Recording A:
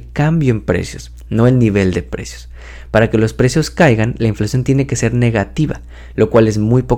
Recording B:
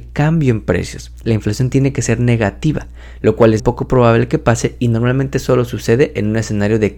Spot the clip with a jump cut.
B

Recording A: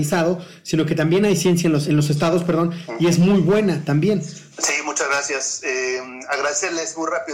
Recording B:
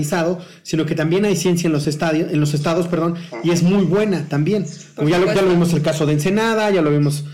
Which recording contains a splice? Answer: A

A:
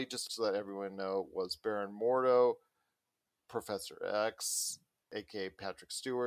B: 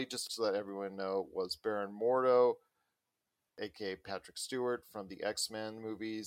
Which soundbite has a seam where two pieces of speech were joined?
B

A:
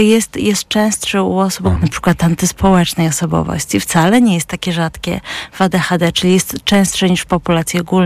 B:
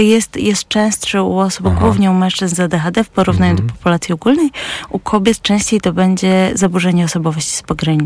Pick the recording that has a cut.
A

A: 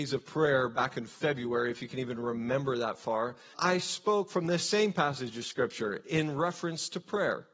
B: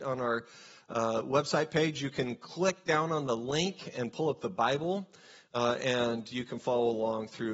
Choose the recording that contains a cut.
A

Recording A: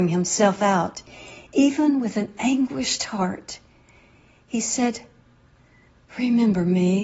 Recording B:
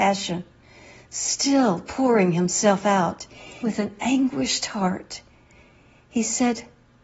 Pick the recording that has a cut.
B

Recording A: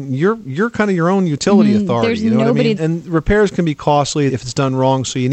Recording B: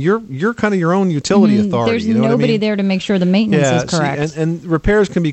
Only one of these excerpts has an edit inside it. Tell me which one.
A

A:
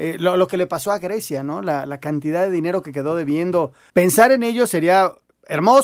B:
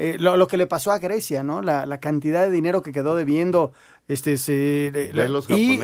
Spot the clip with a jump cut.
A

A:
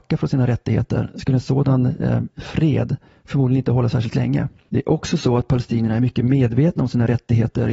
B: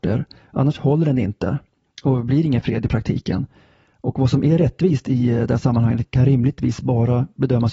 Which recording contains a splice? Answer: A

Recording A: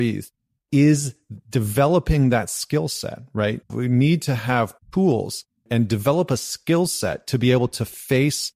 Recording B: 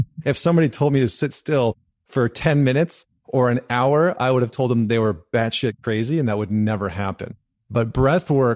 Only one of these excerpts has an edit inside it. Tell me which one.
A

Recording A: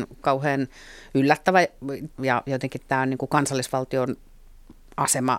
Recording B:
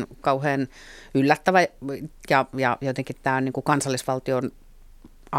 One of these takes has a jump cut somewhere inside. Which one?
A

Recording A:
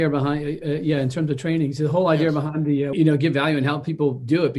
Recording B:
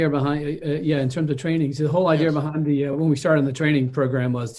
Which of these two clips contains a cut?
A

